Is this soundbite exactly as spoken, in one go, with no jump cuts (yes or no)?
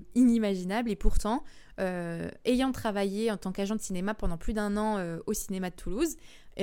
yes